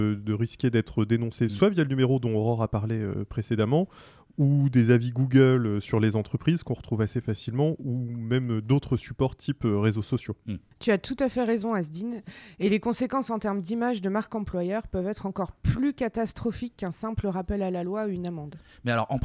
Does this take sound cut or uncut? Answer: uncut